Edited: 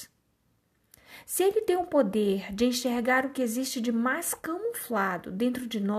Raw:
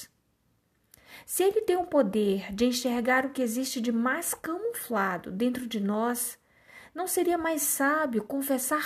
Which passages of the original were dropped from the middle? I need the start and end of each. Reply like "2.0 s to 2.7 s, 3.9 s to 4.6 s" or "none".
none